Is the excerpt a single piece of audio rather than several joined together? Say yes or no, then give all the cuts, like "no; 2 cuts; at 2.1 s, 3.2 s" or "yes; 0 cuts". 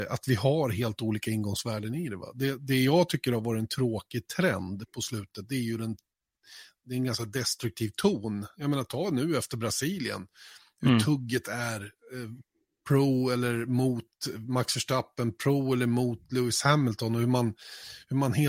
yes; 0 cuts